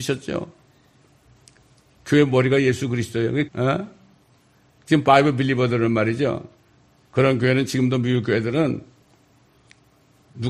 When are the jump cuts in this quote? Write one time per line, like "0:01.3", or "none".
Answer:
0:03.5